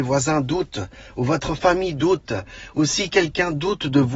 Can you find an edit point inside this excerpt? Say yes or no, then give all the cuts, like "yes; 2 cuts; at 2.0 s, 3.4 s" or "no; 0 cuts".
no; 0 cuts